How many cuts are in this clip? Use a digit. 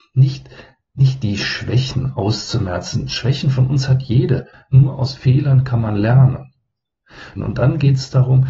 2